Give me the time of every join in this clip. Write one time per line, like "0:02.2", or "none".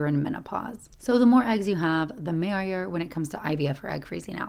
0:00.9